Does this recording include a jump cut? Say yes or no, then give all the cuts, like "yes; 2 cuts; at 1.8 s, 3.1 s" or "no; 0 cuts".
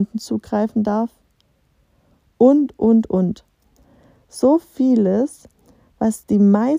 no; 0 cuts